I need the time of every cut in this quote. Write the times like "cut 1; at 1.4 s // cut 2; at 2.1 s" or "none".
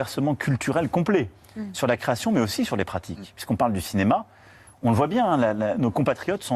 none